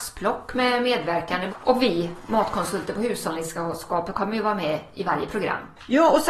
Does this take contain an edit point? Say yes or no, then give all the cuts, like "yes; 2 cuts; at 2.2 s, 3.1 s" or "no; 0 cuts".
yes; 1 cut; at 1.5 s